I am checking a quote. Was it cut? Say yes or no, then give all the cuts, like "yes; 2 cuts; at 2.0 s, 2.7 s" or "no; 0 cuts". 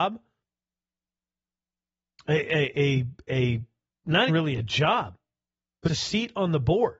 yes; 2 cuts; at 4.3 s, 5.9 s